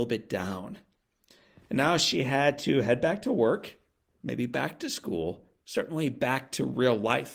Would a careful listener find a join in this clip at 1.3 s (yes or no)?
no